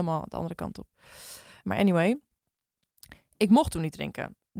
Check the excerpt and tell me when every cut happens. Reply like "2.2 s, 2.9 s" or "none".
1.6 s